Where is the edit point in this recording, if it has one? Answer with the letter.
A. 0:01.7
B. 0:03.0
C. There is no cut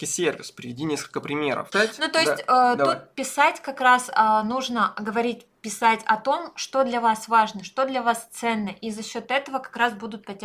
A